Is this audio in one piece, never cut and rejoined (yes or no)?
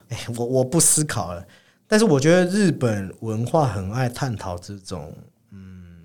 yes